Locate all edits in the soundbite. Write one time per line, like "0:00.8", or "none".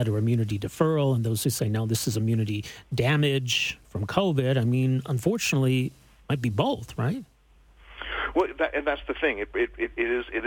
none